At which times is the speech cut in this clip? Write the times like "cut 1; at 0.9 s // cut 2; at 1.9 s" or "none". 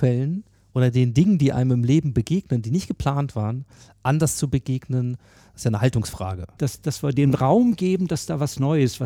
cut 1; at 6.6 s